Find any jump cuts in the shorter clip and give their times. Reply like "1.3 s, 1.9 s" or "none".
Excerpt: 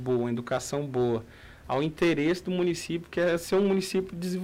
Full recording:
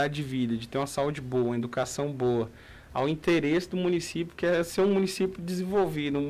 none

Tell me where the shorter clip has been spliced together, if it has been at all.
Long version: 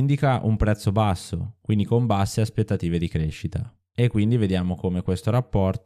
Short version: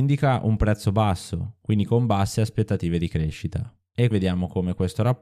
4.1 s

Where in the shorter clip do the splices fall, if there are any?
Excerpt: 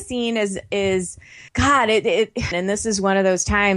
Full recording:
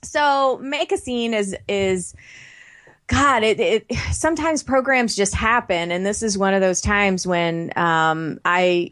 1.5 s, 2.5 s

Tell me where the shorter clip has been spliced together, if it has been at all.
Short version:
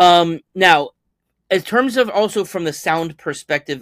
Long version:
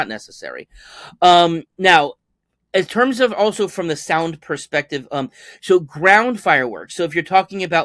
none

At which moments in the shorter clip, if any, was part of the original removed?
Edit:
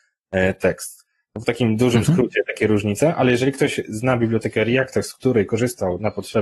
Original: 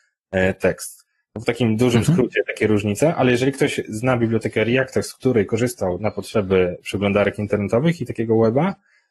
none

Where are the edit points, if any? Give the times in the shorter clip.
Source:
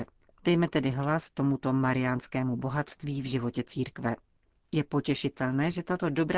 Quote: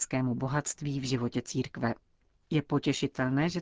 none

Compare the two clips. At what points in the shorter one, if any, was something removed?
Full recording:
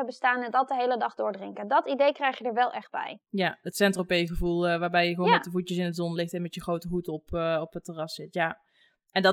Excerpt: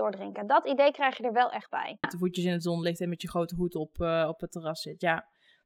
2.0 s

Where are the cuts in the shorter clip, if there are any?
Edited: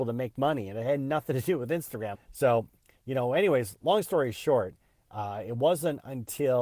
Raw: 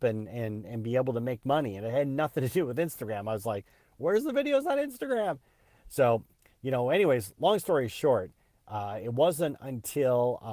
2.1 s

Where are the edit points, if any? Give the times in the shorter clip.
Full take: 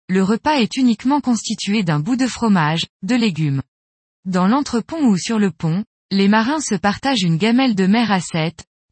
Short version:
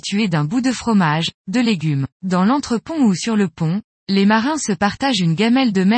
2.1 s

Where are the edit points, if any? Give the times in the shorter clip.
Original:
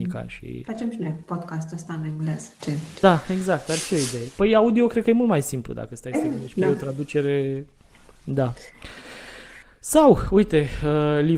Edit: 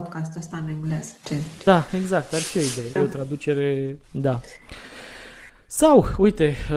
3.0 s, 4.0 s

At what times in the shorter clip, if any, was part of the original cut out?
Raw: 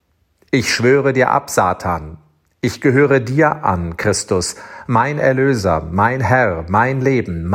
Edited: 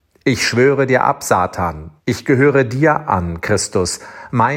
2.0 s

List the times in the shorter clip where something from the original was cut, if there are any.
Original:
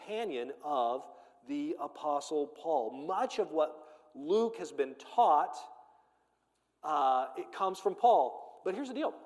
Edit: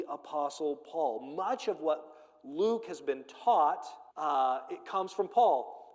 4.1 s

